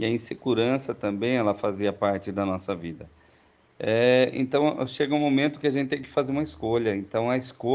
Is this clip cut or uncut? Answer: uncut